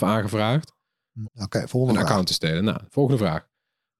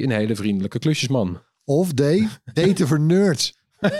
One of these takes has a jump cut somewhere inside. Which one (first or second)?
first